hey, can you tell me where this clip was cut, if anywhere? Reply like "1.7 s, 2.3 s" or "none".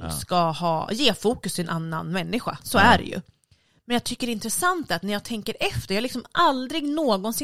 none